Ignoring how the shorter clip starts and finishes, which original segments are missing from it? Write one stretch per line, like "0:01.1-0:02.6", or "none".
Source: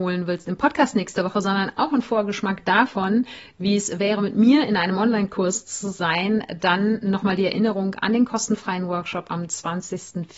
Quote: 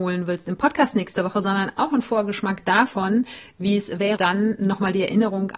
0:04.2-0:06.6